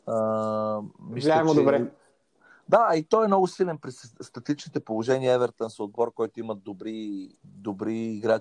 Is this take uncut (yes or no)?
no